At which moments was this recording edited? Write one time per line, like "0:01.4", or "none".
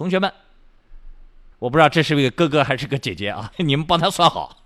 0:01.5
0:03.5